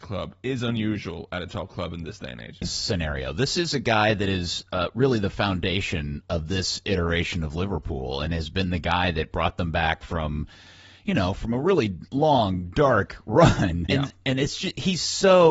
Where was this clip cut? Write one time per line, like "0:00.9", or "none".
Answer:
0:02.6
0:13.9